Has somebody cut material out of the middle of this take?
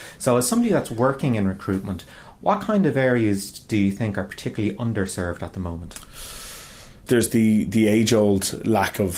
yes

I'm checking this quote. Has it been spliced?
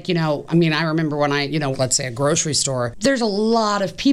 yes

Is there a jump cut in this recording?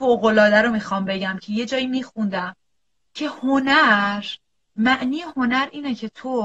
no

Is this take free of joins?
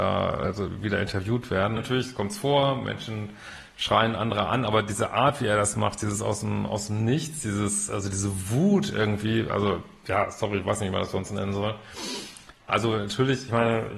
no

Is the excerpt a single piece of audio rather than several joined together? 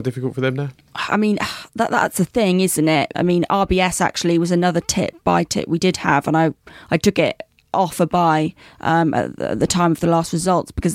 no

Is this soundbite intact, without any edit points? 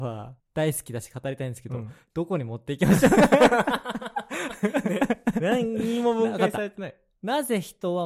no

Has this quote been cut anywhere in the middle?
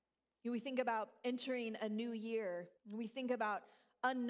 yes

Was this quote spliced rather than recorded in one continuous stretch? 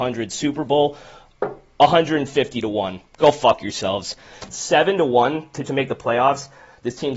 yes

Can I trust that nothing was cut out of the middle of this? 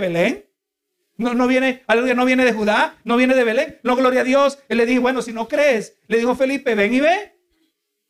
yes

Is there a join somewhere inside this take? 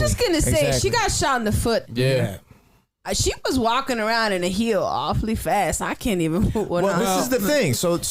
yes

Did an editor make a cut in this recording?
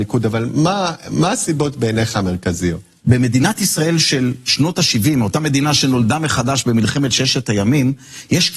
yes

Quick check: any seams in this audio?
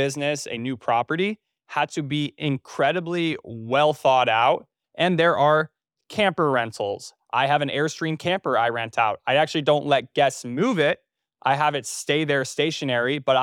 yes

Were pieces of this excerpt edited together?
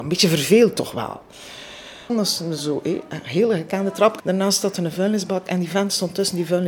yes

